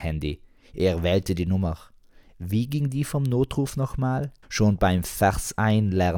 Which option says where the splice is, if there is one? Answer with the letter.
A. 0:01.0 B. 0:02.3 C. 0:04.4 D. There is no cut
C